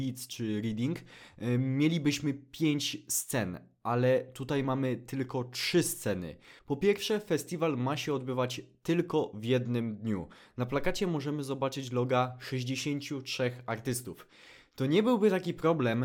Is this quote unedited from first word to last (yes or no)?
no